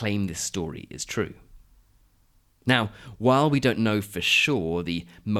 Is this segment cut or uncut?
uncut